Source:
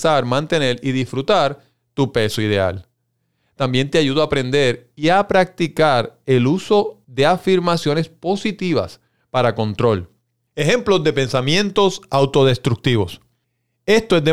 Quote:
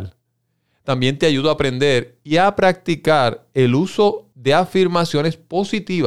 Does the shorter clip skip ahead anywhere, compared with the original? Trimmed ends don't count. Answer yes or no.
no